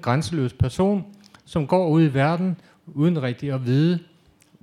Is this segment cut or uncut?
uncut